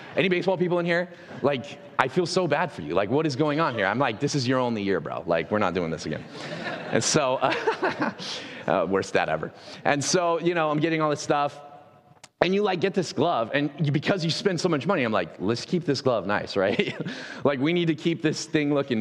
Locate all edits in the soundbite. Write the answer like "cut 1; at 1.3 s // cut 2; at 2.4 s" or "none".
none